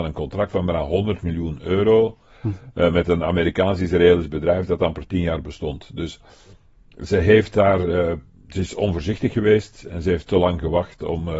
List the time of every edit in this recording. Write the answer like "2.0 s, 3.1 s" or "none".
none